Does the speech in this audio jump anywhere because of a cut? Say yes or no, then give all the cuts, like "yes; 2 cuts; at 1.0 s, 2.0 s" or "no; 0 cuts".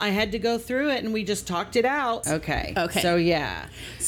yes; 1 cut; at 2.2 s